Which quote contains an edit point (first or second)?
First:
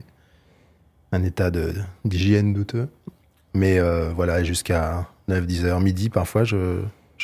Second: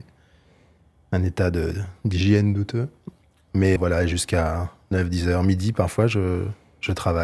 second